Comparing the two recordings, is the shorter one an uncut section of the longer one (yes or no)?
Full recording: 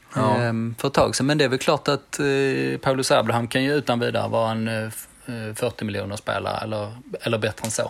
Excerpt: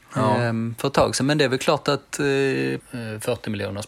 no